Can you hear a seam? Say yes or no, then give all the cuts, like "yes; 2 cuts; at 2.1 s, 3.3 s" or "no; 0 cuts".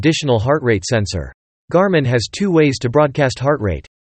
yes; 1 cut; at 1.6 s